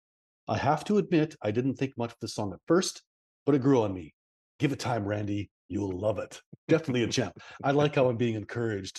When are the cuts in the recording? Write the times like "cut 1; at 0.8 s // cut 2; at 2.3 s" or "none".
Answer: none